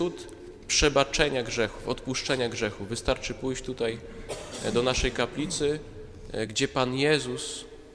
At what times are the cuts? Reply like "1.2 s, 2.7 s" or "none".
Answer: 6.5 s